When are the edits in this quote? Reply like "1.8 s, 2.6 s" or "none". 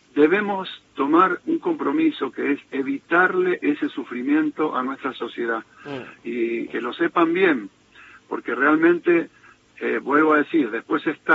6.7 s